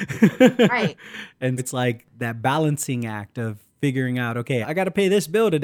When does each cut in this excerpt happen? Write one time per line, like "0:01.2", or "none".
0:01.6
0:04.6